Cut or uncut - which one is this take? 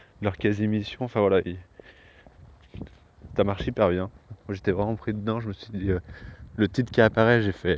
cut